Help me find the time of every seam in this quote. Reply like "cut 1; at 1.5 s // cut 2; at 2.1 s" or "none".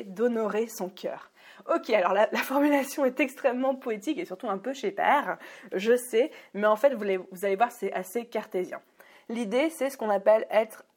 none